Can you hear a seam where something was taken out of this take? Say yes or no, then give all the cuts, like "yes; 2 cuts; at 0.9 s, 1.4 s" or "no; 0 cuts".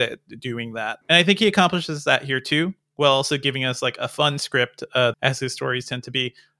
yes; 2 cuts; at 1.0 s, 5.1 s